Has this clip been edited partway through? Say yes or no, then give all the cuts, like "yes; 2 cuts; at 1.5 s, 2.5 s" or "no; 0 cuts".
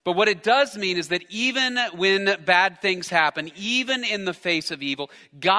no; 0 cuts